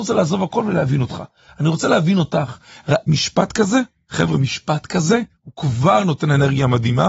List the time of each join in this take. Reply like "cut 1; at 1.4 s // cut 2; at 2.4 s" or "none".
none